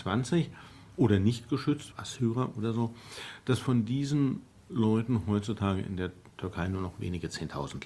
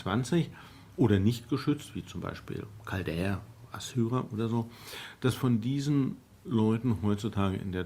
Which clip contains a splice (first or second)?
first